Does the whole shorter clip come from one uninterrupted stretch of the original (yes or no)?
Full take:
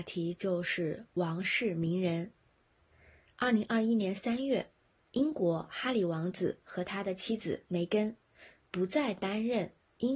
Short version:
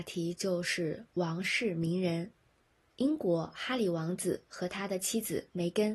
no